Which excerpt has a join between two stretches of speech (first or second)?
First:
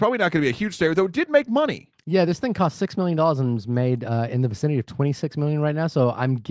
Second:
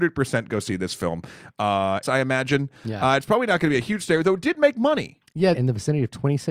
second